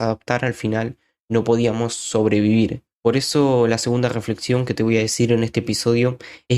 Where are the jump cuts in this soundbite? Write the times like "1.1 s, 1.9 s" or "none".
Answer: 2.8 s